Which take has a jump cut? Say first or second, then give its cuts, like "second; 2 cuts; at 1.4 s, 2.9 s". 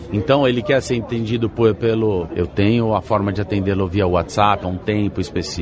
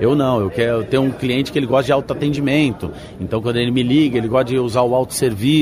first; 2 cuts; at 2.3 s, 4.6 s